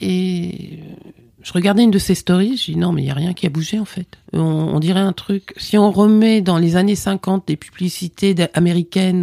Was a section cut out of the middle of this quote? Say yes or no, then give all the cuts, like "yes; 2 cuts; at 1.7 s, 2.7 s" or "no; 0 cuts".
yes; 1 cut; at 4.2 s